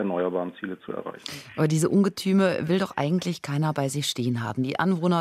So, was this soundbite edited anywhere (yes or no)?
no